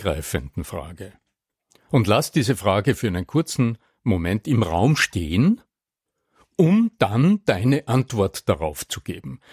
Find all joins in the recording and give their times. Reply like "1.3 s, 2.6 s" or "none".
none